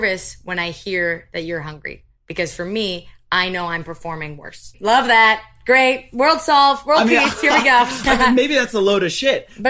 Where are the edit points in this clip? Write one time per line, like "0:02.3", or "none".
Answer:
0:04.7